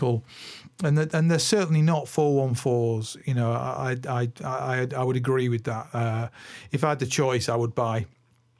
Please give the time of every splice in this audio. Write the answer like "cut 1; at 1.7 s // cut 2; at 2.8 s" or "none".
none